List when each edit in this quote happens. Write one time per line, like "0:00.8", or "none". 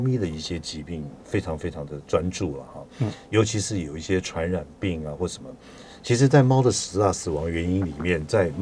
none

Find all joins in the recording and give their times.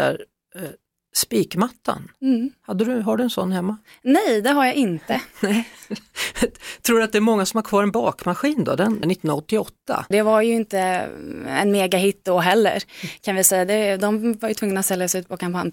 0:09.0
0:10.1

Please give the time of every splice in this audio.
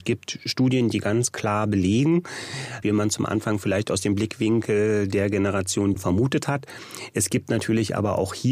0:02.8
0:05.9

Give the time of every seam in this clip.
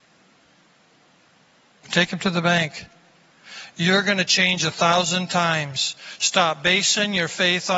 0:01.8

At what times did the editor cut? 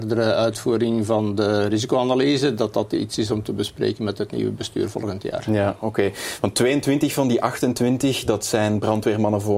none

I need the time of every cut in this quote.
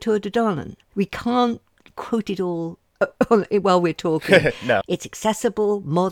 0:00.9
0:04.8

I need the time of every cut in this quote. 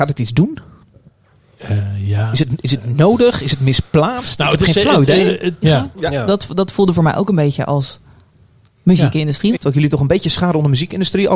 0:05.6
0:09.5

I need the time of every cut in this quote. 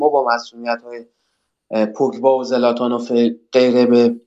none

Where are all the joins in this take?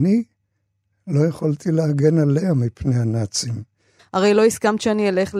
0:04.0

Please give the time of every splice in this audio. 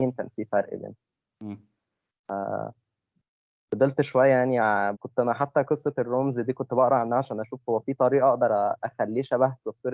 0:04.9

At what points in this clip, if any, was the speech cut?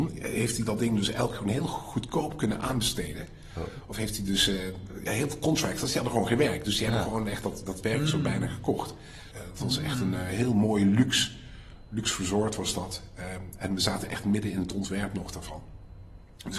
0:09.3

